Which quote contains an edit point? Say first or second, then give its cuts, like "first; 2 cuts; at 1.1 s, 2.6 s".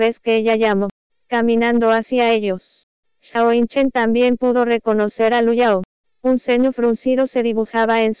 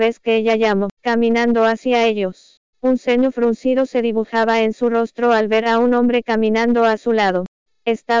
second; 2 cuts; at 1.0 s, 2.7 s